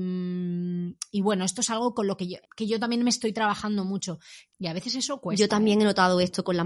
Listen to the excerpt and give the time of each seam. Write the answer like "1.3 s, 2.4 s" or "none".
2.4 s, 4.5 s